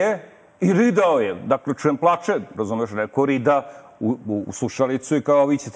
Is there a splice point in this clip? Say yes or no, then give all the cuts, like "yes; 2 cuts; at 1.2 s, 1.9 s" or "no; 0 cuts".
yes; 1 cut; at 2.5 s